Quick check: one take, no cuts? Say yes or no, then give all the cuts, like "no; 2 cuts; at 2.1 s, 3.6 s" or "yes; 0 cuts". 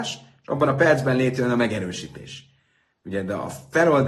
yes; 0 cuts